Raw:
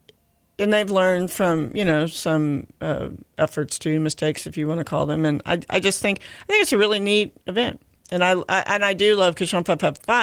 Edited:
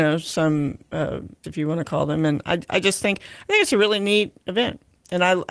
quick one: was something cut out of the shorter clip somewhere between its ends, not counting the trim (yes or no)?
yes